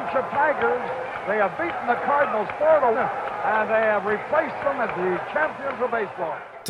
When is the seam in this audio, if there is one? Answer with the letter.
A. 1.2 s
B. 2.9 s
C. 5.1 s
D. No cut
B